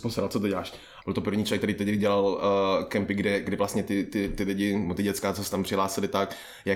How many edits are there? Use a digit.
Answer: 1